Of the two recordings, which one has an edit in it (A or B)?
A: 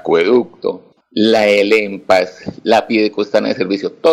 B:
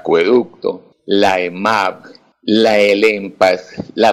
A